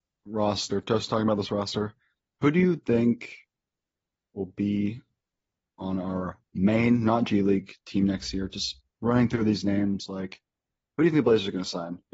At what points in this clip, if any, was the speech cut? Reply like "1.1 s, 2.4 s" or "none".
none